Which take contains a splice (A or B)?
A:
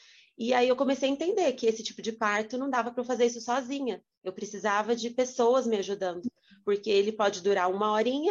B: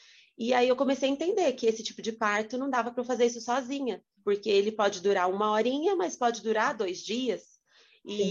B